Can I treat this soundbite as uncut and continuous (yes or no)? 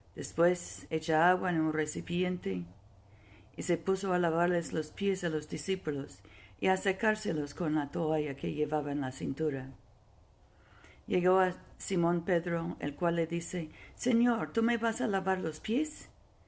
yes